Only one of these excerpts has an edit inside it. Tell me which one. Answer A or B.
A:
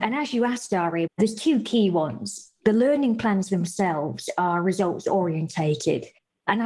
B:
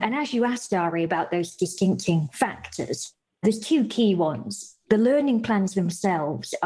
A